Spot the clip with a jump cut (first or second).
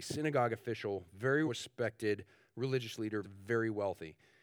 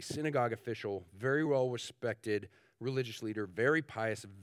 first